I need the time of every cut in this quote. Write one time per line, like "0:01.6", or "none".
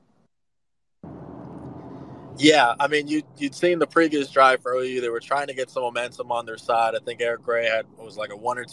none